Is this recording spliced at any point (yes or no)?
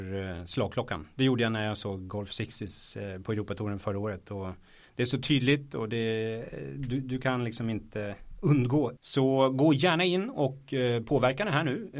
yes